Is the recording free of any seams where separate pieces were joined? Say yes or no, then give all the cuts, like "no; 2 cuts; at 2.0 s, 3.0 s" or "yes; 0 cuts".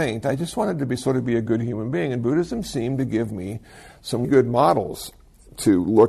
no; 1 cut; at 4.2 s